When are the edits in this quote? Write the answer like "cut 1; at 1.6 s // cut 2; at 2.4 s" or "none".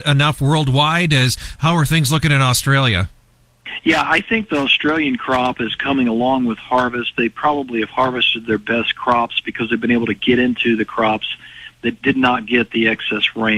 none

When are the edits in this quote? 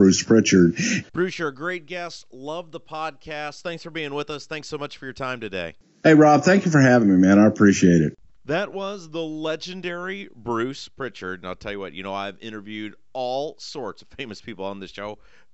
cut 1; at 1.0 s

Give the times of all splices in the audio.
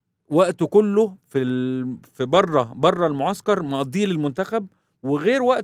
none

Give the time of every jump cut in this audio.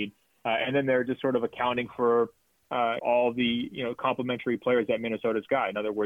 cut 1; at 3.0 s

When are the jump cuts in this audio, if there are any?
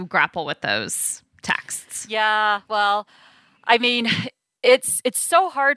none

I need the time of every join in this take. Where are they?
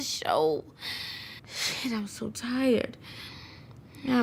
cut 1; at 1.4 s

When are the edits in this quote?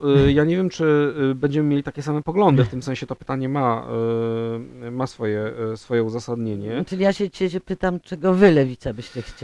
none

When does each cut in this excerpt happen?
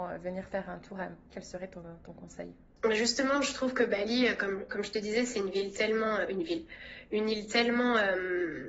cut 1; at 1.3 s

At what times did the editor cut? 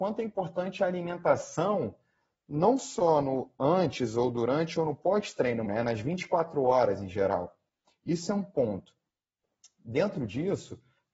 cut 1; at 5.7 s

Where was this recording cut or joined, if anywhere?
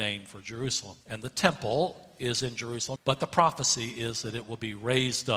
cut 1; at 1.0 s // cut 2; at 3.0 s

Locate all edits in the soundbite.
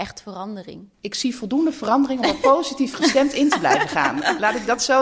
cut 1; at 0.9 s

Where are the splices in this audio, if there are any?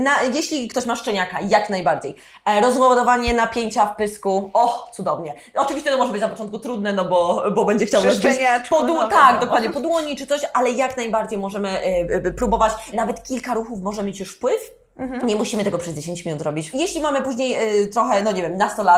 cut 1; at 12.9 s // cut 2; at 16.7 s

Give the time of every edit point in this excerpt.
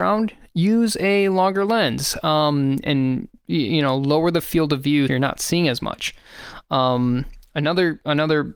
cut 1; at 2.8 s // cut 2; at 5.1 s

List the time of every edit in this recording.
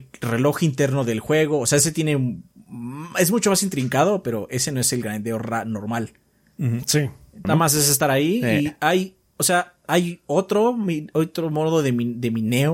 cut 1; at 7.4 s

